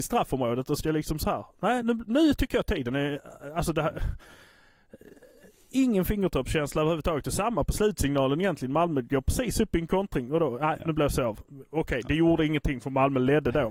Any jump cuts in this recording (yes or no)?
no